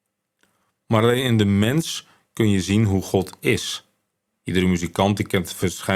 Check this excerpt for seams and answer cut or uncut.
cut